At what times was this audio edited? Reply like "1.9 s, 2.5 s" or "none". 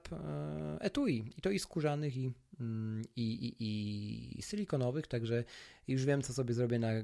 none